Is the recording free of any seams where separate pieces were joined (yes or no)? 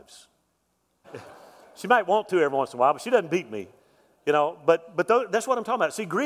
no